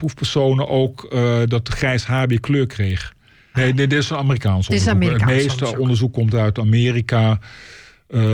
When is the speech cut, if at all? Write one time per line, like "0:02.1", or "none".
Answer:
0:03.5